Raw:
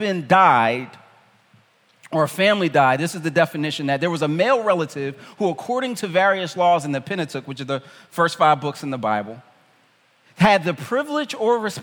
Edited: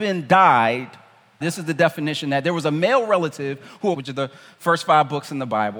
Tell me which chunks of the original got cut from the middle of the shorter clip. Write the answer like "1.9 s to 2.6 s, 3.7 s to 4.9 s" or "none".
1.4 s to 3.0 s, 5.5 s to 7.5 s